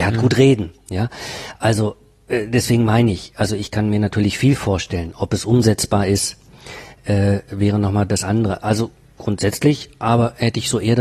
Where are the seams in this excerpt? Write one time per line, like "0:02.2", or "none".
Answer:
none